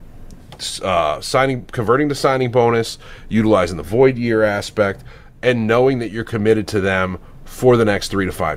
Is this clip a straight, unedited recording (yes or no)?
yes